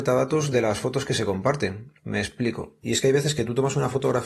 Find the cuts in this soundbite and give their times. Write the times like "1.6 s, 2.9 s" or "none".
2.0 s